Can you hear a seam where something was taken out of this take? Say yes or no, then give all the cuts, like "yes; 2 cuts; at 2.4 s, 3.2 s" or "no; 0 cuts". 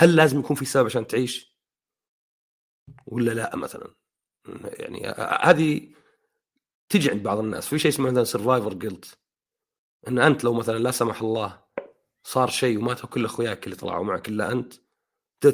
no; 0 cuts